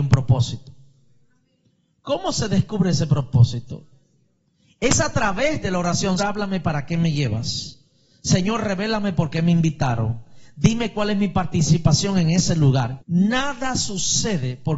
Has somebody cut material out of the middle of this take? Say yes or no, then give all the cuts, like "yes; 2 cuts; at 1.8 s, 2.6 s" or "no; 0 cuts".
yes; 2 cuts; at 6.2 s, 13.0 s